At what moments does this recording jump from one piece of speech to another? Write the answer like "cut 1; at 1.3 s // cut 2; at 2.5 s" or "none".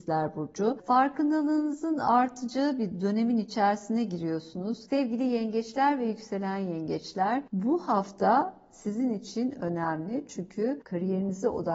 cut 1; at 4.9 s